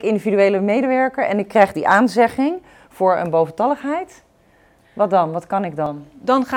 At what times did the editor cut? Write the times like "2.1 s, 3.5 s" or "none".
none